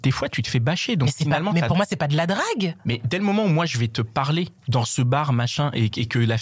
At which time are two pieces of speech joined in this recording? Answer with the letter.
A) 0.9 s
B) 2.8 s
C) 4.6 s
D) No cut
C